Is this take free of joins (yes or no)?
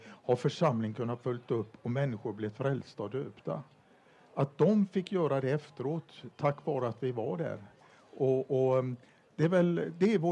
yes